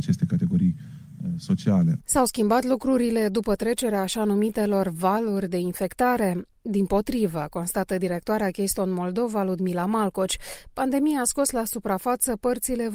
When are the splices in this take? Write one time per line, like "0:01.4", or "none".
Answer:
0:02.0